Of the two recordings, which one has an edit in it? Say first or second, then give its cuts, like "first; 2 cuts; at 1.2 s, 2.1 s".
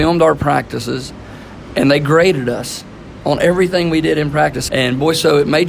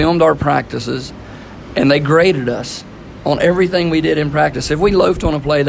first; 1 cut; at 4.7 s